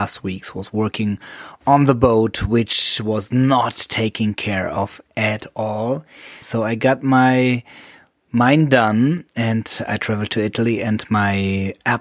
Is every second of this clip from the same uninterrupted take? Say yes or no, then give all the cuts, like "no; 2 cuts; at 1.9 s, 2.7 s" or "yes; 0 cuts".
no; 1 cut; at 6.4 s